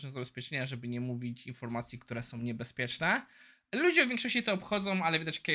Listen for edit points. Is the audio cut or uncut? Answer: uncut